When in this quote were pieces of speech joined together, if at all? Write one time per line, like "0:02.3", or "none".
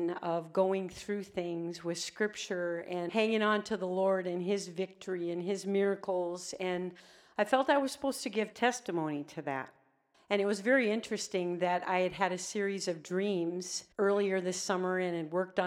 0:10.1
0:13.9